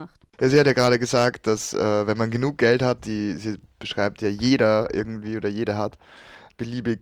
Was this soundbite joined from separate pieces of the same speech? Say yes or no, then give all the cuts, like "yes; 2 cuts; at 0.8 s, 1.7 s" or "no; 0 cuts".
yes; 1 cut; at 3.0 s